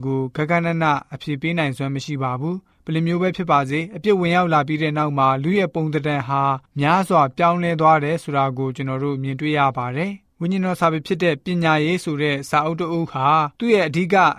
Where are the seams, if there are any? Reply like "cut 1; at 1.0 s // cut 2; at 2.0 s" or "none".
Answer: none